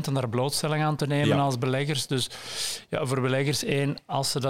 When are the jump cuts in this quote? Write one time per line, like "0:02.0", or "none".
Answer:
none